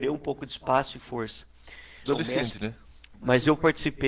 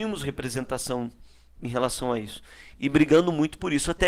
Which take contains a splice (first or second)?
first